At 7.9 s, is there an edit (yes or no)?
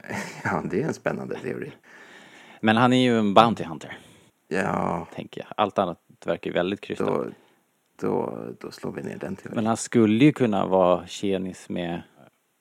no